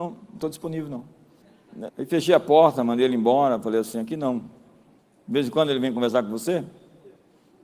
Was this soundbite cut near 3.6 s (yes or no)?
no